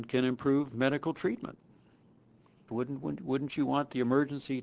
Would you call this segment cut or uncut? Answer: cut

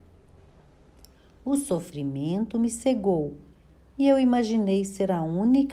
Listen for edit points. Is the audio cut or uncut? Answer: uncut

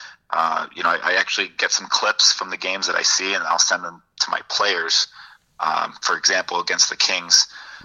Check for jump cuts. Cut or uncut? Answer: uncut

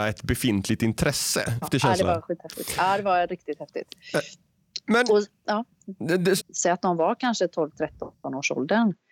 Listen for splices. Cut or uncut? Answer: cut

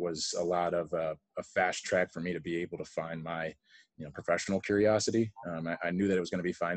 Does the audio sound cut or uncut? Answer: uncut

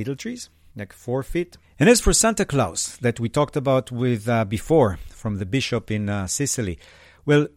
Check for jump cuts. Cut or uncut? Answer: cut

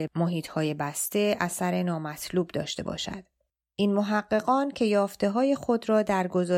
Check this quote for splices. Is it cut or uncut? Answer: uncut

